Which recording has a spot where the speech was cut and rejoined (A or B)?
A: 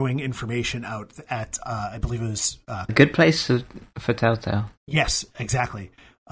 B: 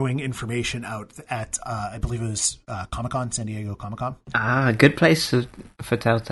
A